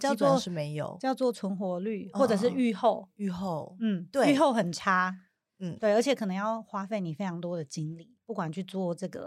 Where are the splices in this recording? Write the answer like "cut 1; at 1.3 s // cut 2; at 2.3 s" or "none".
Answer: none